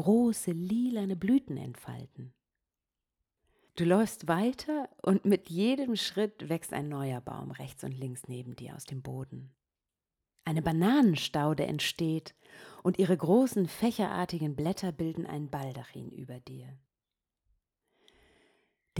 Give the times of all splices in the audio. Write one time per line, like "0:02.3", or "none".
0:10.4